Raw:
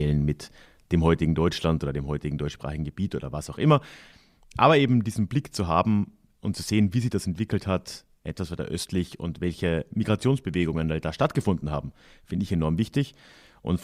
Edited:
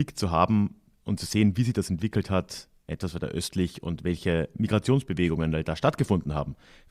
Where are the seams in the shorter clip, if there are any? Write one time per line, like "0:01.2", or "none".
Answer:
none